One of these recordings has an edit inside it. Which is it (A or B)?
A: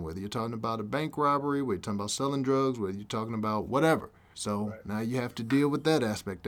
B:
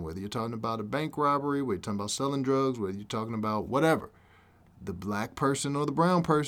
A